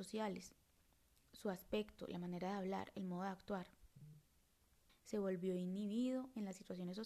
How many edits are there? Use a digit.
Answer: 1